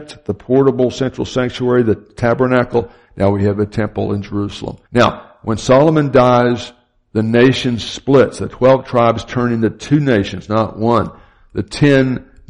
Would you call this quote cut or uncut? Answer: cut